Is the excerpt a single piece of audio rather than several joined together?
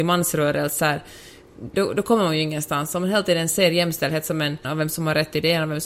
no; 2 cuts; at 1.7 s, 4.6 s

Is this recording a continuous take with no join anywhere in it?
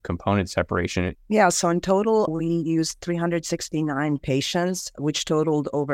no; 2 cuts; at 1.1 s, 2.3 s

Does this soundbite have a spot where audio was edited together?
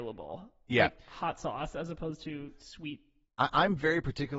no; 0 cuts

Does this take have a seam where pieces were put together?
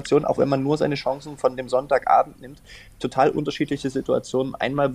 no; 0 cuts

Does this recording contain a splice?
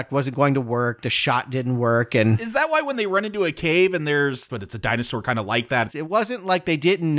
yes; 2 cuts; at 4.5 s, 5.9 s

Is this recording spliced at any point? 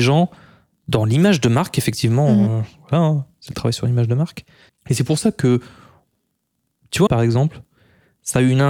yes; 2 cuts; at 4.7 s, 7.1 s

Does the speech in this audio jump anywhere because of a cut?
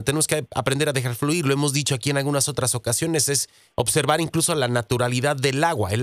no; 0 cuts

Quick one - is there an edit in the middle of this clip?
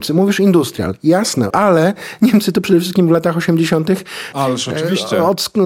yes; 2 cuts; at 1.5 s, 4.3 s

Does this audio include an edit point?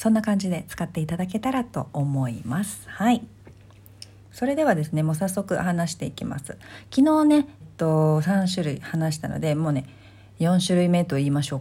yes; 1 cut; at 7.6 s

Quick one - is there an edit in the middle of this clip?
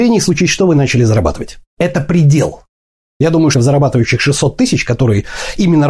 yes; 2 cuts; at 1.8 s, 3.5 s

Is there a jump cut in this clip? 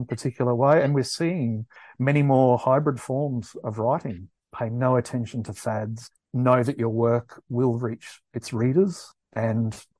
yes; 1 cut; at 4.4 s

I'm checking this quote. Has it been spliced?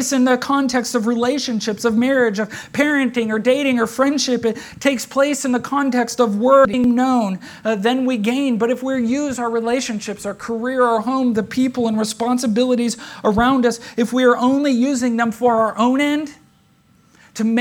no; 0 cuts

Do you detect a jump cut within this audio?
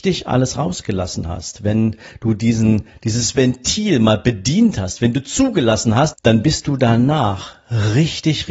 yes; 1 cut; at 6.1 s

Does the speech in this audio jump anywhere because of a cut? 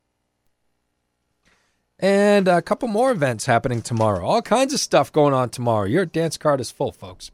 no; 0 cuts

